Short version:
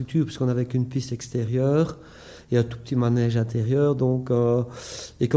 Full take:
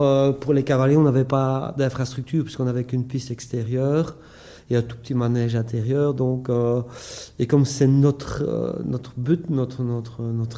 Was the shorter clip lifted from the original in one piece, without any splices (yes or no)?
yes